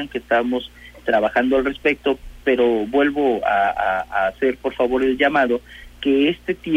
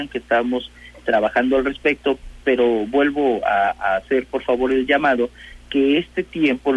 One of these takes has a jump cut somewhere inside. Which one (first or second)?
second